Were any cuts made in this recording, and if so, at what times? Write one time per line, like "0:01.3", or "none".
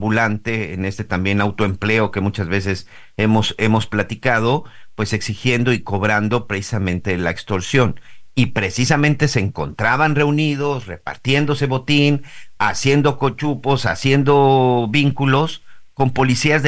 none